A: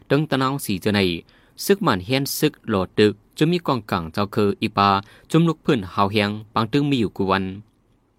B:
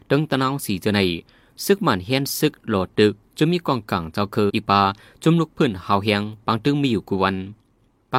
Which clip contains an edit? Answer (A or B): B